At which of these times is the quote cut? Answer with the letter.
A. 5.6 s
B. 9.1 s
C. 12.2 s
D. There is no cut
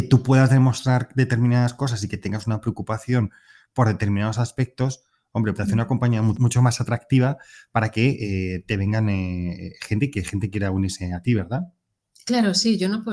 A